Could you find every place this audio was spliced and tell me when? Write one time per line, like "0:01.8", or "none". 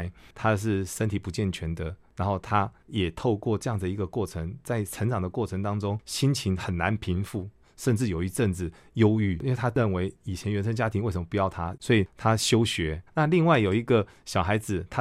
0:11.8
0:13.1